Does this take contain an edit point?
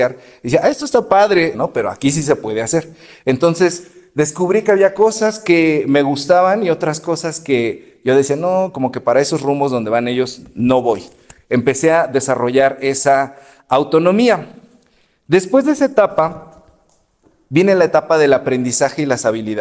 yes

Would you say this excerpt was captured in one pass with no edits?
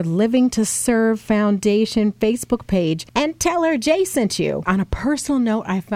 no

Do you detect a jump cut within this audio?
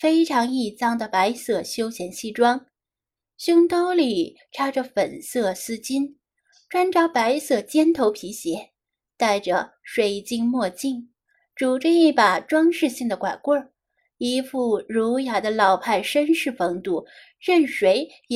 no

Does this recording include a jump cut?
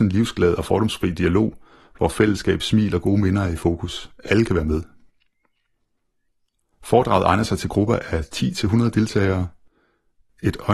no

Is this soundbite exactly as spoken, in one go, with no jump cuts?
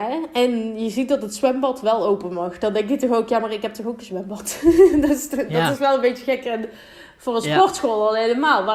yes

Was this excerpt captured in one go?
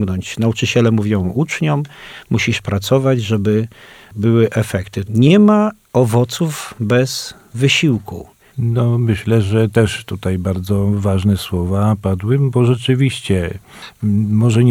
no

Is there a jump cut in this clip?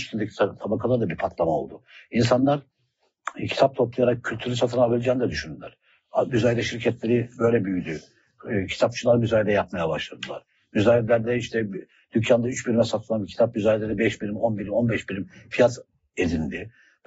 no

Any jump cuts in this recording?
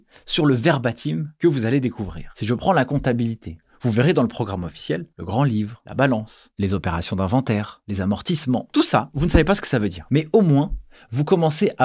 yes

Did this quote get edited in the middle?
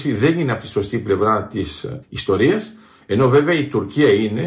yes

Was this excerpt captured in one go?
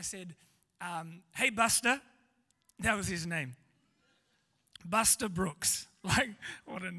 yes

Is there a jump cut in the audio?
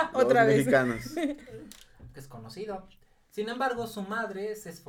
yes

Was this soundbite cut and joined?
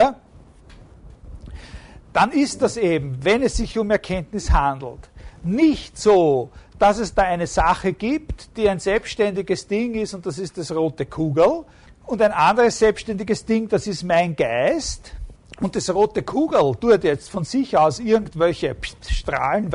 yes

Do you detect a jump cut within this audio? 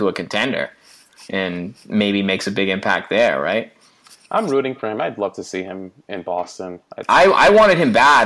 no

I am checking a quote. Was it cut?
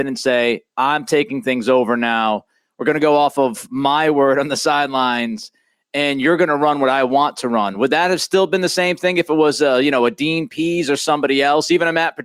no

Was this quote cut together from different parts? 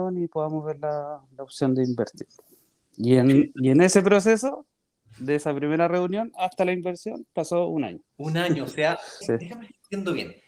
yes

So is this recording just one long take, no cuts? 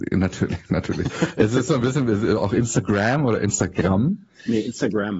yes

